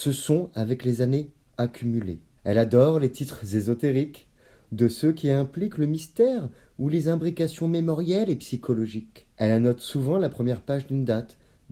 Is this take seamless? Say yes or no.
no